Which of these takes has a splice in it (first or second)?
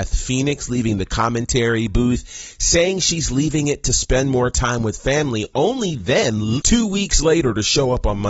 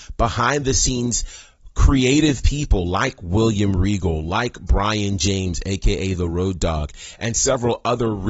first